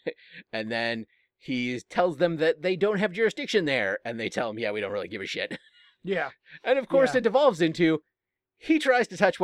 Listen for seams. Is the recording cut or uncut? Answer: uncut